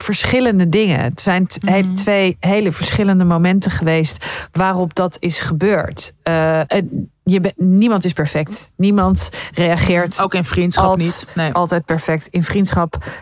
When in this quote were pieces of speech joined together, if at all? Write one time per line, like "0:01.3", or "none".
0:06.7

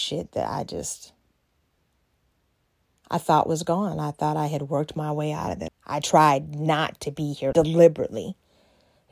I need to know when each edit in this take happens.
0:05.7
0:07.5

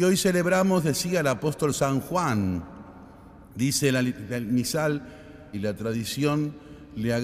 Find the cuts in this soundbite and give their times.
0:03.5
0:05.5

